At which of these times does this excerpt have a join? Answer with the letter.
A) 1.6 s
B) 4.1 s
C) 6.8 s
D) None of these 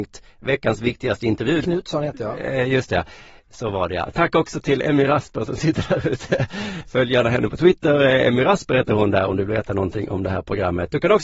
A